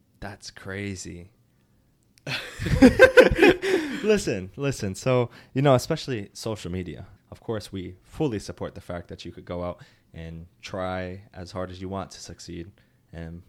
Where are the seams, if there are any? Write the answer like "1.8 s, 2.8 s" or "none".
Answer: 7.2 s

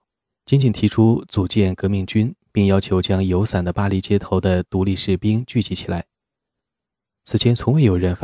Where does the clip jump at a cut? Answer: none

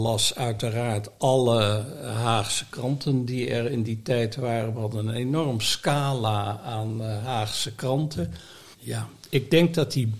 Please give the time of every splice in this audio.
8.7 s

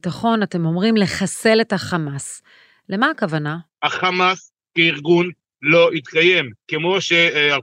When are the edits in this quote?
3.7 s

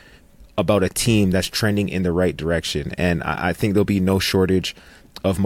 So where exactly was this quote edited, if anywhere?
none

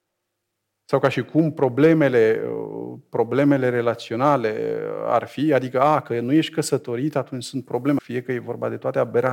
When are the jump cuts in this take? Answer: 8.0 s

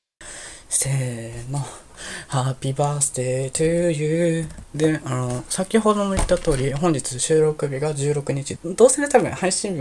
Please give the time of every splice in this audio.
4.6 s, 8.6 s

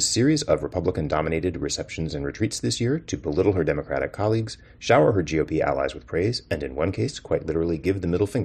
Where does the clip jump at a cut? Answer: none

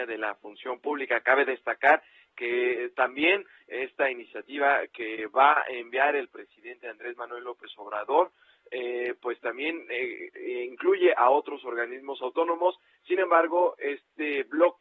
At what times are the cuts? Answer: none

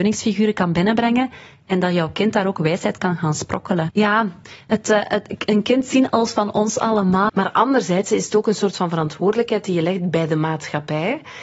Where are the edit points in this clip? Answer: 3.9 s, 7.3 s

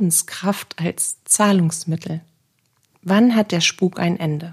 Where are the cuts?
2.9 s

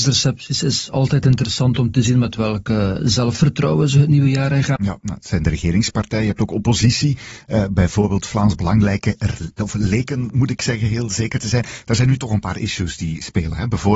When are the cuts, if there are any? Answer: 4.8 s

